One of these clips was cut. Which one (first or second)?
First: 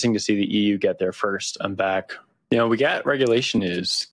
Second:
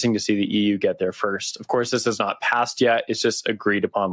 first